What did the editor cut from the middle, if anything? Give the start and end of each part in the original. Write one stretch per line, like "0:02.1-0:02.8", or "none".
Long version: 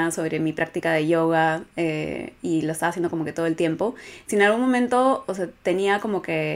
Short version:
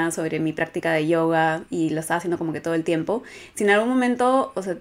0:01.7-0:02.4